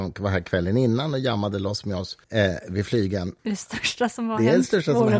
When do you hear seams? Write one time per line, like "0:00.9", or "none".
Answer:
0:02.2
0:03.4